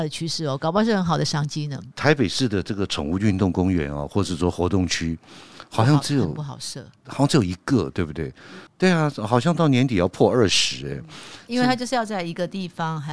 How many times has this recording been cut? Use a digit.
2